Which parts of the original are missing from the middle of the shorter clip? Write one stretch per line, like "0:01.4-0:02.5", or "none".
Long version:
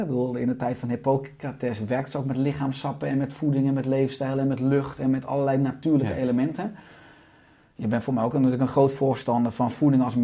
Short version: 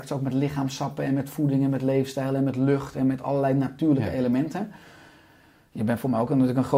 none